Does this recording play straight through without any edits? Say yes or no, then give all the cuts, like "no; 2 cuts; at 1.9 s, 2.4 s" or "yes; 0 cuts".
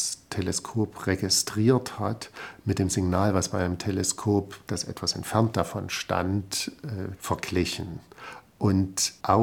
no; 1 cut; at 7.2 s